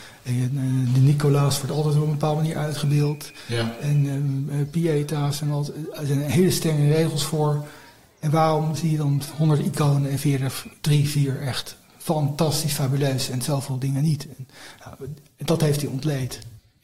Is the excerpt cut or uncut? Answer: uncut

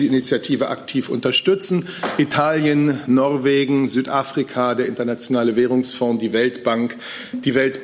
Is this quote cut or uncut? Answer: uncut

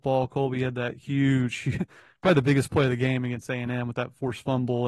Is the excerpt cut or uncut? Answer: uncut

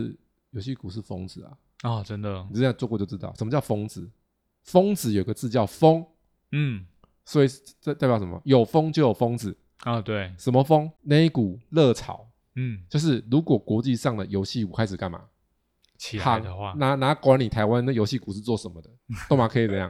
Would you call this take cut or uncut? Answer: uncut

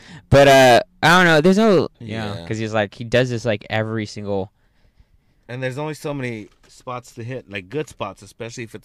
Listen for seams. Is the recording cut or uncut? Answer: cut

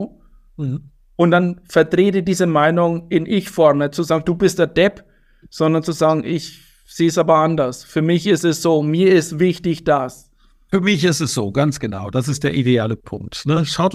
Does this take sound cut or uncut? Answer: uncut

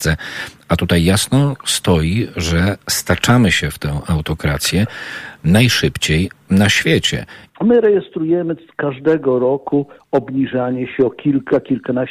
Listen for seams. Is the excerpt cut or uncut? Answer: cut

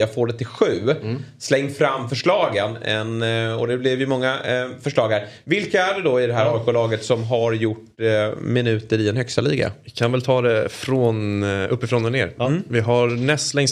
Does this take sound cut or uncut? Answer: uncut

